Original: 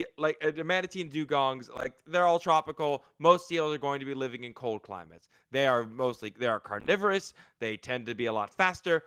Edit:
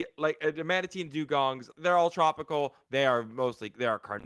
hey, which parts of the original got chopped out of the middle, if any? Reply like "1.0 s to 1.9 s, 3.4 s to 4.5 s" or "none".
1.7 s to 2.0 s, 3.1 s to 5.5 s